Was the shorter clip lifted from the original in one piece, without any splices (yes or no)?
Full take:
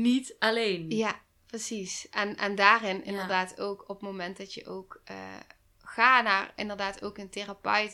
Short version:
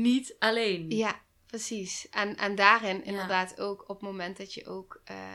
yes